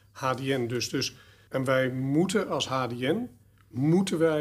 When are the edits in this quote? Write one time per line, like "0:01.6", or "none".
none